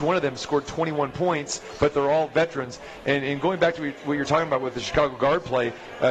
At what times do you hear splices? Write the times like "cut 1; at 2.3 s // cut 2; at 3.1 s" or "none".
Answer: none